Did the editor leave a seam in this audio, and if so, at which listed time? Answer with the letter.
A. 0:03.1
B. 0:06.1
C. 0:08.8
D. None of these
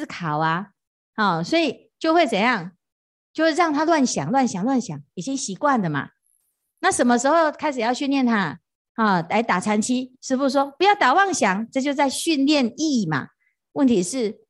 C